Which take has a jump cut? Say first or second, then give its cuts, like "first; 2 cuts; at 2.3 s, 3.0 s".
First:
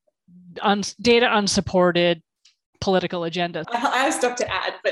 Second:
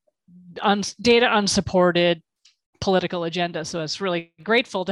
first; 1 cut; at 3.6 s